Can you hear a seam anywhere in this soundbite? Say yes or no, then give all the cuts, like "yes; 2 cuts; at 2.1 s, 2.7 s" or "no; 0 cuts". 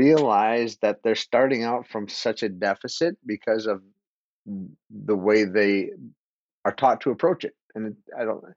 no; 0 cuts